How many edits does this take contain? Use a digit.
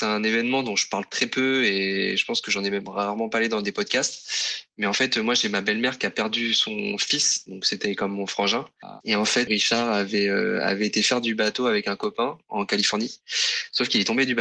1